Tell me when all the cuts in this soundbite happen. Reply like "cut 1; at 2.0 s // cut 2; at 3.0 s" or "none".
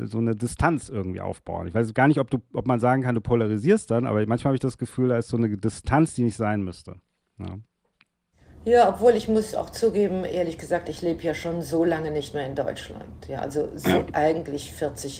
none